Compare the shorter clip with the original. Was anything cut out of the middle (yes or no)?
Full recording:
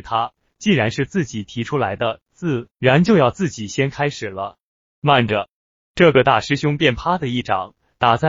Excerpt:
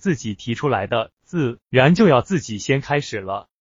no